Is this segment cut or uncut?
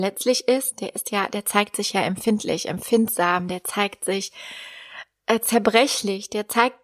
uncut